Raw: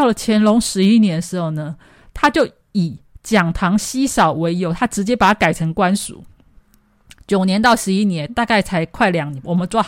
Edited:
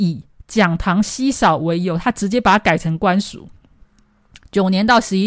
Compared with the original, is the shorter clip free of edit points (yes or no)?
yes